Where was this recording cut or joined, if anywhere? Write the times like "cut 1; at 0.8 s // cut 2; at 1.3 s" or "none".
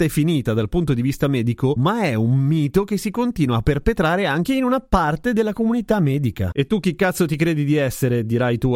cut 1; at 1.8 s